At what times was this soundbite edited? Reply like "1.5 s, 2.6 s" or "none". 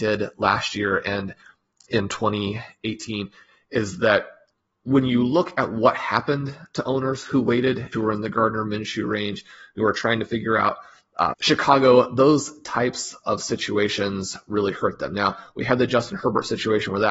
7.9 s, 11.3 s